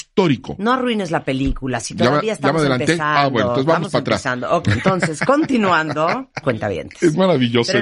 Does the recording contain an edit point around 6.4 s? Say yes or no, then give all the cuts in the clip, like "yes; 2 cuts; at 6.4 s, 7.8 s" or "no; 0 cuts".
yes; 2 cuts; at 4.6 s, 6.4 s